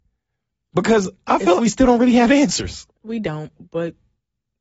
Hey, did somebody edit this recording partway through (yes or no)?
yes